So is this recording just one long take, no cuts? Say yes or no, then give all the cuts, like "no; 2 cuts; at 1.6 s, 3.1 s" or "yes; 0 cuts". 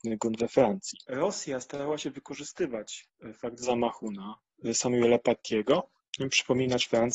no; 1 cut; at 1.0 s